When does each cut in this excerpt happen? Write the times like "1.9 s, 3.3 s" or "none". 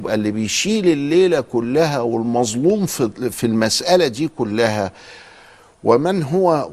3.3 s

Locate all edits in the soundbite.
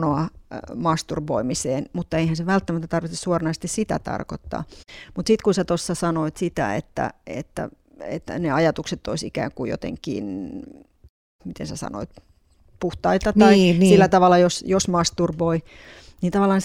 none

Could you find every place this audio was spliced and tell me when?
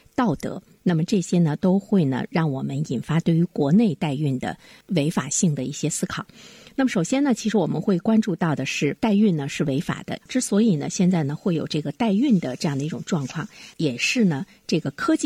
9.0 s, 10.2 s

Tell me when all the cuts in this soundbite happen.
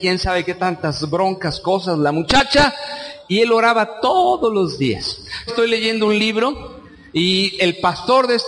5.5 s, 7.6 s

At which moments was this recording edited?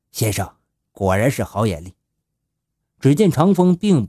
2.2 s

